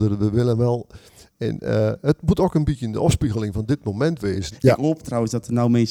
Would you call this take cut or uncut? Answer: cut